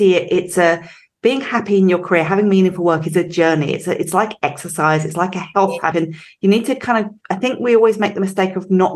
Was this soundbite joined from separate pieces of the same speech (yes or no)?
yes